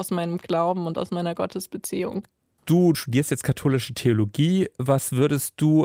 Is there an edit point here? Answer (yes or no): no